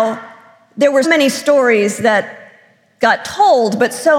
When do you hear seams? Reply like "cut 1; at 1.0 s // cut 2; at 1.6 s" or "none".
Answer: cut 1; at 1.0 s